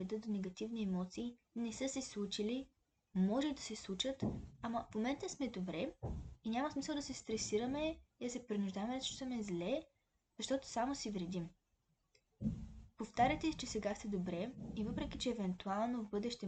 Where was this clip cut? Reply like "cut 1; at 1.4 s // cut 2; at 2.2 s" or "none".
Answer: cut 1; at 1.5 s